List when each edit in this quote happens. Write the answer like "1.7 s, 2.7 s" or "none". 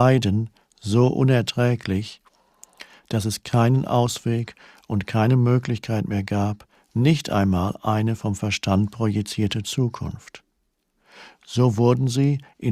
6.7 s

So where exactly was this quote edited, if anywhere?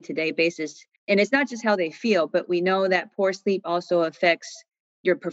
1.0 s

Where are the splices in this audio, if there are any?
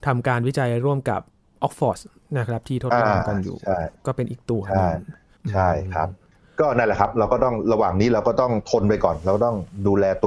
none

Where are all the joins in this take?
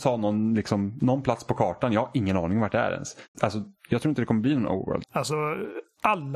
3.3 s, 5.0 s

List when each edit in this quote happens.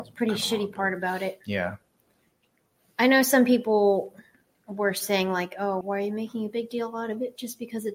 5.8 s

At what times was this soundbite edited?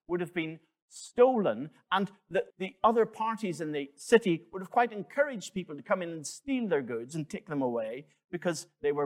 2.5 s

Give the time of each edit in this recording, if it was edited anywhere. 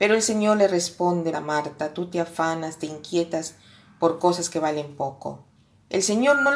1.3 s, 2.8 s

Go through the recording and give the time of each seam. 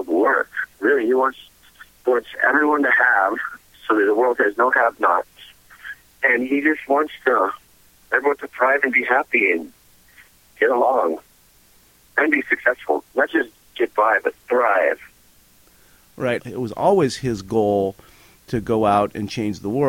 16.4 s

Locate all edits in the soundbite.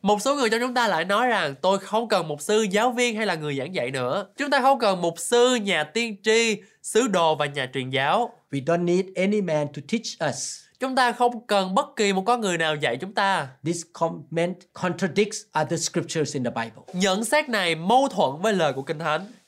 4.4 s

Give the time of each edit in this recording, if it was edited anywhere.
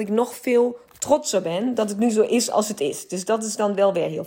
none

